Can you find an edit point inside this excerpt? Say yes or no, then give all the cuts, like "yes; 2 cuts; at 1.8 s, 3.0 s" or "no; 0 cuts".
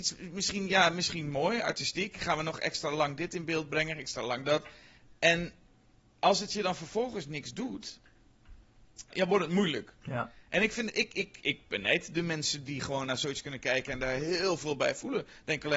yes; 1 cut; at 9.1 s